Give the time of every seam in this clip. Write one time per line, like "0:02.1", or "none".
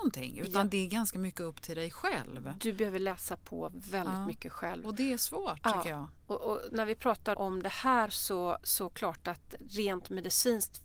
0:07.3